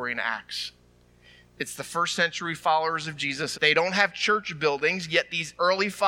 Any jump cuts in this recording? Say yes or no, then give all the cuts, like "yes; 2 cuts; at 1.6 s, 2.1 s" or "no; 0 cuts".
yes; 1 cut; at 3.5 s